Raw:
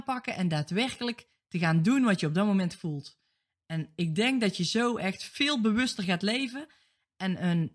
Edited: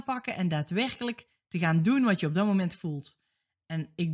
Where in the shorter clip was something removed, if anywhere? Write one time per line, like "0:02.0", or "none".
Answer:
none